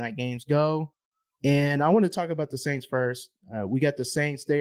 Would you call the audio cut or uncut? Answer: uncut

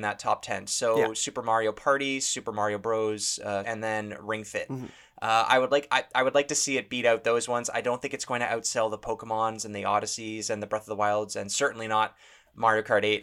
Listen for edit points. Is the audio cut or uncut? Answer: cut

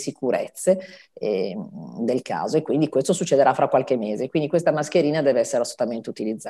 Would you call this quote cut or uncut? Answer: uncut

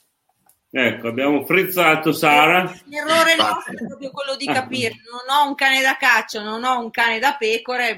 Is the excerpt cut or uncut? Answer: uncut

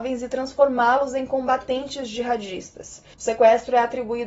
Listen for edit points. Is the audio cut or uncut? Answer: cut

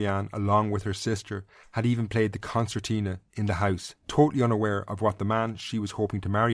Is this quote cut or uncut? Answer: uncut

